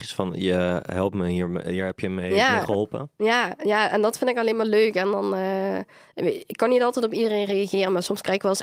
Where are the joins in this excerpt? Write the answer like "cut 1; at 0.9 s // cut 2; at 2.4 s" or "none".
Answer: none